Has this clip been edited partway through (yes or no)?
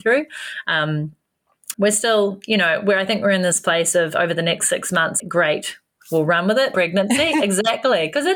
yes